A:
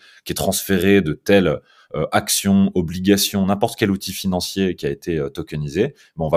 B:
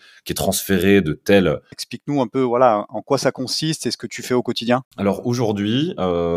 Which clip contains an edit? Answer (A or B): B